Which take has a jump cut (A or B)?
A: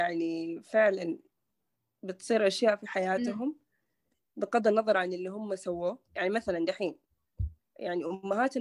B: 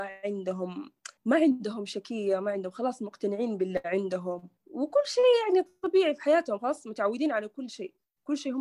B